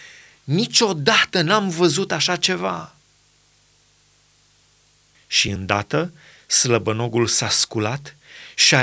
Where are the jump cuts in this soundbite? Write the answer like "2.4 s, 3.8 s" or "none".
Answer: 5.1 s